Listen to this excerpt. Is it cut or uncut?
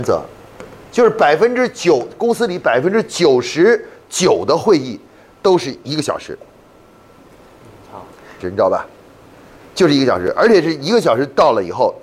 cut